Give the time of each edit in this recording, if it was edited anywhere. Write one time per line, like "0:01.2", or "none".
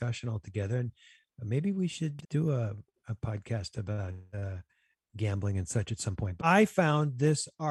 0:02.2
0:06.4